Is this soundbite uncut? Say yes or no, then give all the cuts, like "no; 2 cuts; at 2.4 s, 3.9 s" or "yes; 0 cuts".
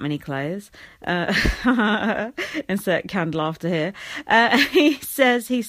yes; 0 cuts